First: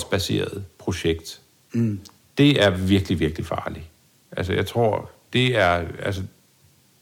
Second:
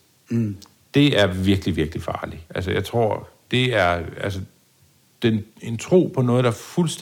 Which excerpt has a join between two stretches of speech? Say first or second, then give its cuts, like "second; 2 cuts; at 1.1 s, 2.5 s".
second; 2 cuts; at 2.5 s, 5.5 s